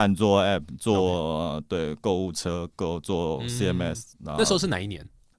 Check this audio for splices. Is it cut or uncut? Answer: uncut